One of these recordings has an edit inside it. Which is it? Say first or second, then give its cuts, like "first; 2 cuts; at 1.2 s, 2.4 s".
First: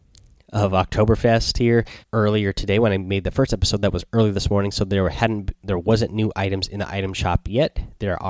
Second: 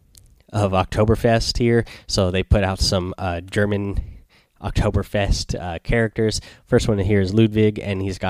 first; 1 cut; at 2.0 s